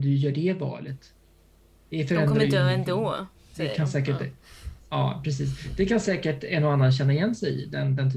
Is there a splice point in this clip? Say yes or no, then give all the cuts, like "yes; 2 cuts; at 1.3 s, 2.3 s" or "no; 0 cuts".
no; 0 cuts